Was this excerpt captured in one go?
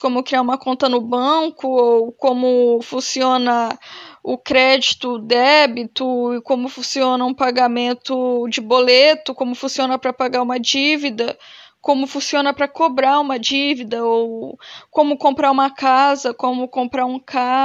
yes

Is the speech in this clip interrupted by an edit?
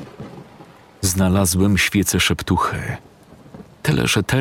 no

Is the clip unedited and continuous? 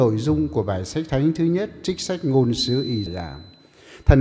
no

